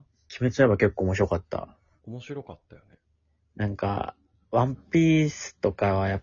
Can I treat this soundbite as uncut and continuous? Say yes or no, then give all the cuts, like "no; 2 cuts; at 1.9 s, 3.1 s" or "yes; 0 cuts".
no; 1 cut; at 2.0 s